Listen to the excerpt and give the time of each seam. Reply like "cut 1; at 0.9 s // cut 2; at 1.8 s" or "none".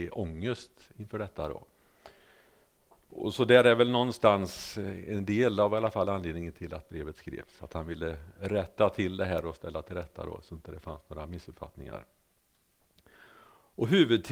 none